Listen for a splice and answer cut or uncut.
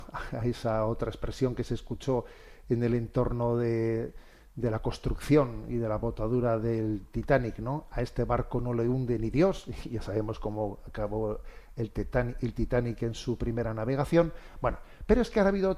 uncut